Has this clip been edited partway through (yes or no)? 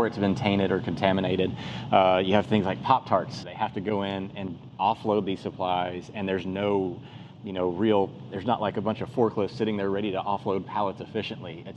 yes